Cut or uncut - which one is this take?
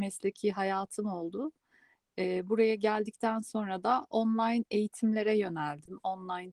uncut